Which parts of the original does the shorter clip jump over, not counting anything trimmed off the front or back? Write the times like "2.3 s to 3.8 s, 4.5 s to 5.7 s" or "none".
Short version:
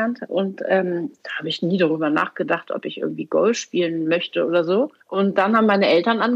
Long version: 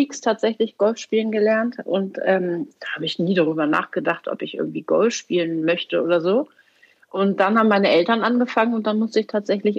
6.6 s to 7.0 s